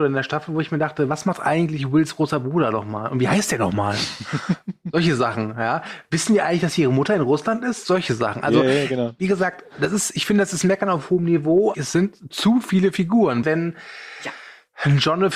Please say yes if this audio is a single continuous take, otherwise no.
no